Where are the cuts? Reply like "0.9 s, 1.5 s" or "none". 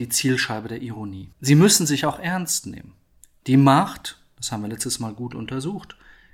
1.3 s